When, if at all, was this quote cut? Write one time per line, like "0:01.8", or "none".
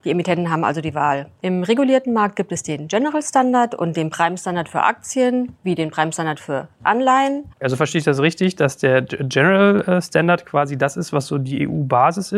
0:07.5